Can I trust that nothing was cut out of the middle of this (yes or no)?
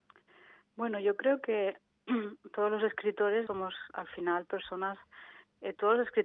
no